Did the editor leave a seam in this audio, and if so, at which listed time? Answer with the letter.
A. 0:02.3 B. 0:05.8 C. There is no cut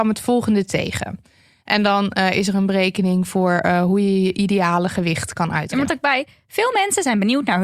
B